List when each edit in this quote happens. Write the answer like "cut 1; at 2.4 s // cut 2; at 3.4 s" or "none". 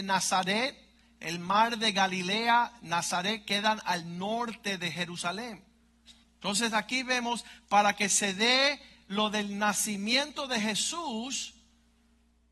cut 1; at 6.2 s